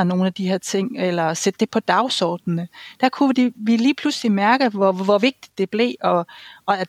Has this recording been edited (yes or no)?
no